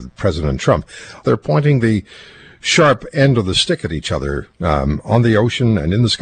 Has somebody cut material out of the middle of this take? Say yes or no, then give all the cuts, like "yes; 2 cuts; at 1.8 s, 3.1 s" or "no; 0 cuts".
yes; 2 cuts; at 1.2 s, 4.5 s